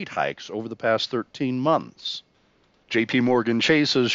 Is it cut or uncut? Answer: cut